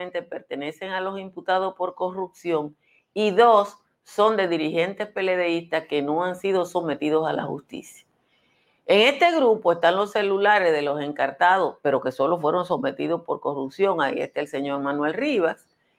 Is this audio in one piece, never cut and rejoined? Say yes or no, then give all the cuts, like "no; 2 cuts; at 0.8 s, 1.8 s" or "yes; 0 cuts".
yes; 0 cuts